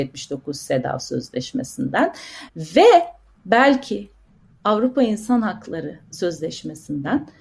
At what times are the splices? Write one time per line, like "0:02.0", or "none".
0:02.5